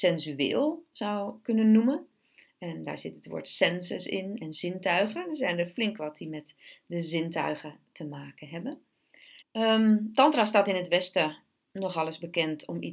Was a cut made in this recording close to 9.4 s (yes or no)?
yes